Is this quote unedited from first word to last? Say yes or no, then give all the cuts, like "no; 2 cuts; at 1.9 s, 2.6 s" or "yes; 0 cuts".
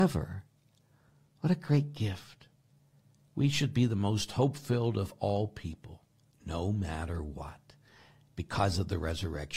yes; 0 cuts